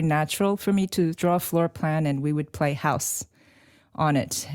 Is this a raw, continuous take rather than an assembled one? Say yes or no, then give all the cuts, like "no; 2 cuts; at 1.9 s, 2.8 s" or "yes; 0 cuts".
no; 1 cut; at 1.2 s